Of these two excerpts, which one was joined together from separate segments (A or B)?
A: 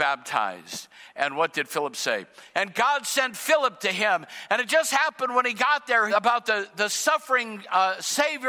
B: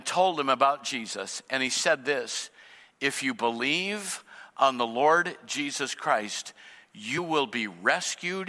A